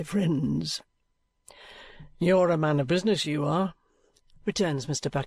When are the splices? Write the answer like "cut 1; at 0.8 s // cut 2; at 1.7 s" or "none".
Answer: none